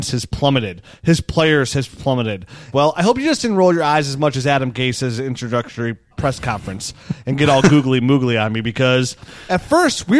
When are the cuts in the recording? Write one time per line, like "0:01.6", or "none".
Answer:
0:02.7
0:06.1